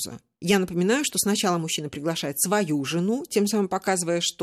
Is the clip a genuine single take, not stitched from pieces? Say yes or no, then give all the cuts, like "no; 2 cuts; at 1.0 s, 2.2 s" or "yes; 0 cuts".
yes; 0 cuts